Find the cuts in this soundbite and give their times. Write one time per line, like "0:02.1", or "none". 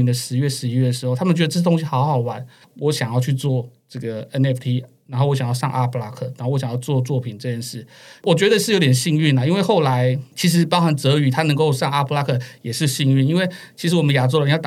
0:02.6